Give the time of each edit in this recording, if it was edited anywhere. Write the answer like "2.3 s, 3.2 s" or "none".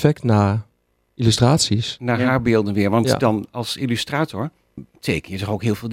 4.8 s